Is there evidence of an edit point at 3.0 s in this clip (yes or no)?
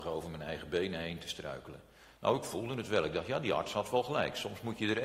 no